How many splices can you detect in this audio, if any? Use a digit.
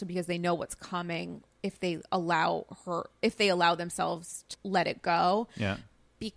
1